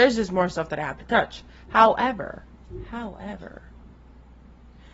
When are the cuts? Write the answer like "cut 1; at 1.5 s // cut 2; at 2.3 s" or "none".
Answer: none